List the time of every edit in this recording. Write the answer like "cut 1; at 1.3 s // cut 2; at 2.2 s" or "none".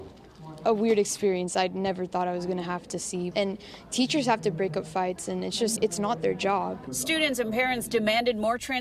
cut 1; at 5.8 s